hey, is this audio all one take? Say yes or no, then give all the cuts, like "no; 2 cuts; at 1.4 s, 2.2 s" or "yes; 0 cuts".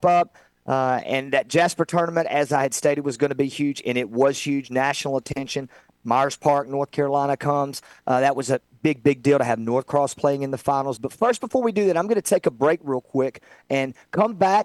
no; 1 cut; at 11.0 s